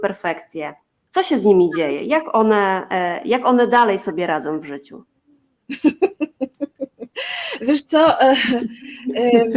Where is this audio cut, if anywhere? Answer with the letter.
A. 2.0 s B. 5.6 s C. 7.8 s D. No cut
D